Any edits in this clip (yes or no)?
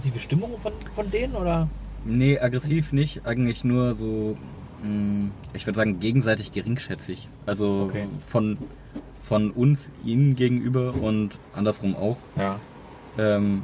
no